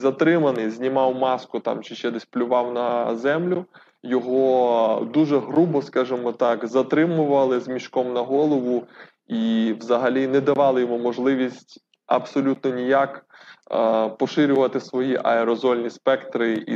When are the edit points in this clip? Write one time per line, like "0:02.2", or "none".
none